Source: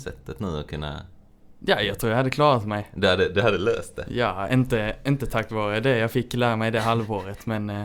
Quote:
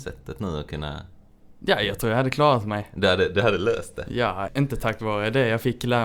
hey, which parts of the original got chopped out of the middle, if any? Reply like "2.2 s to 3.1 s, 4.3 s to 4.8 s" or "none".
4.5 s to 5.0 s

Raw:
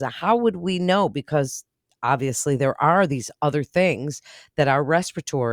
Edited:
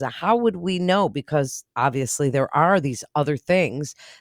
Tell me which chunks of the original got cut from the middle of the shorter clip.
1.7 s to 2.0 s

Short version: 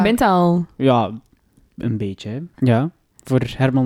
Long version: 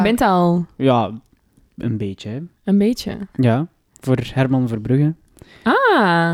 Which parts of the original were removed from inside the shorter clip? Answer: 2.5 s to 3.3 s

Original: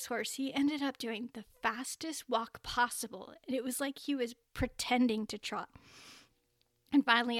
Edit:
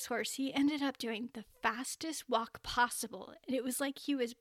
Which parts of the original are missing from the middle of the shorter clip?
none

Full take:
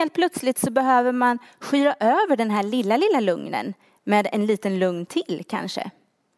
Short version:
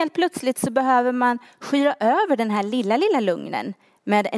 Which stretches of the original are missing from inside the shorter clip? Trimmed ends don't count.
none

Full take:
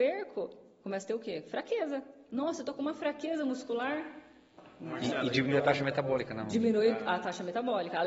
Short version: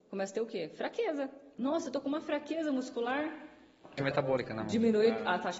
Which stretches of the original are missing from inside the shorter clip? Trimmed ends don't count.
4.7 s to 5.8 s

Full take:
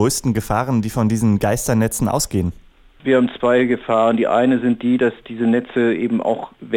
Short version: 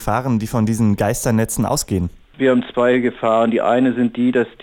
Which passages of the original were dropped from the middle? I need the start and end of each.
2.7 s to 2.9 s

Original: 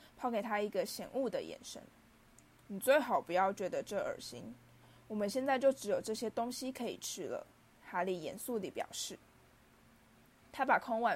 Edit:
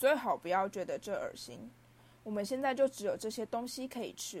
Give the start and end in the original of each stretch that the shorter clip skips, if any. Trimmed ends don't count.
none

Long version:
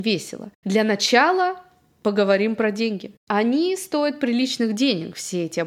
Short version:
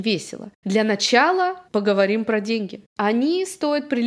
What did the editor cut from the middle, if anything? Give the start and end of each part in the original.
1.7 s to 2.0 s

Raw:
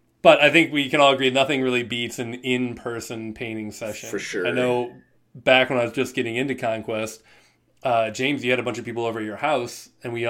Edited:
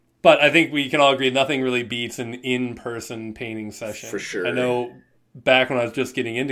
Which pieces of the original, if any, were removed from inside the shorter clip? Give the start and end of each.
none

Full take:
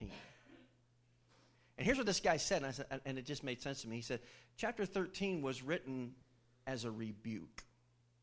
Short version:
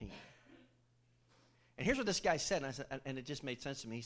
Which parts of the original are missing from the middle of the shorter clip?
none

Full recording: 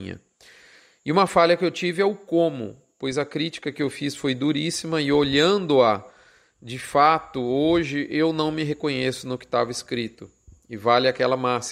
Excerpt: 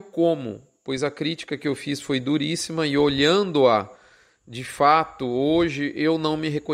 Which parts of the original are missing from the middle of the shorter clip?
none

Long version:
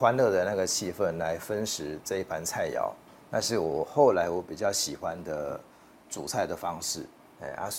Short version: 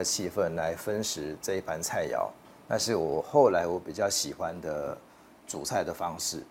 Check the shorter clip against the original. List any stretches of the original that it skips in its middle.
none

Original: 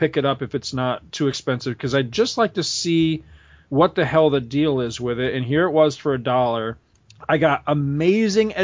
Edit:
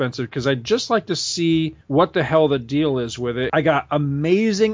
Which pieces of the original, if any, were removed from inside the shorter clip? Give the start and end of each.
3.3 s to 3.6 s, 5.3 s to 7.3 s

